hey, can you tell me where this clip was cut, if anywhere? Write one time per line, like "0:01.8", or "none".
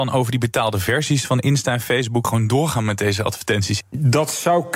0:02.2
0:03.8